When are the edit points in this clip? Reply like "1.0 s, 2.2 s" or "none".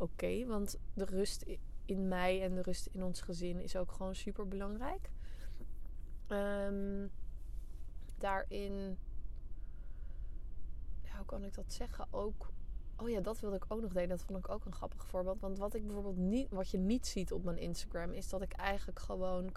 8.2 s